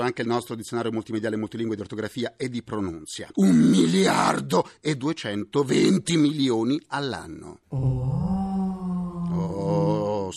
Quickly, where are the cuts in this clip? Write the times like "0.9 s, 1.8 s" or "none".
3.3 s